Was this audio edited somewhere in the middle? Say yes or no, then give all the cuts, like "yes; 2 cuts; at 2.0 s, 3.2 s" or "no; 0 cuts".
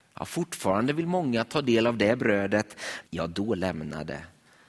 yes; 1 cut; at 3.0 s